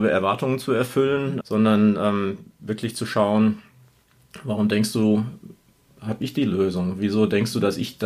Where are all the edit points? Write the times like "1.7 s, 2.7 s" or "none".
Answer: 1.4 s